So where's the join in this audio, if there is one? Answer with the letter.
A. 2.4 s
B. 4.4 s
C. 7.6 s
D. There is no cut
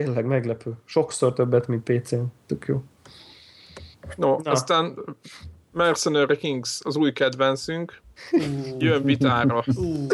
A